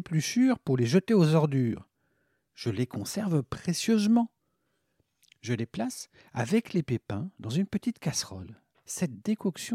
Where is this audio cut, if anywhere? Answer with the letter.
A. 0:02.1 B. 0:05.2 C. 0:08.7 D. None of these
C